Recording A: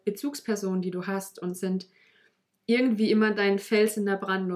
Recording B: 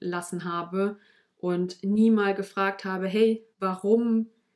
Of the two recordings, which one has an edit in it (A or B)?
B